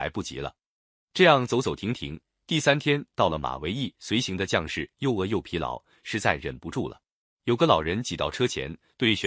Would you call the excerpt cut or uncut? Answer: cut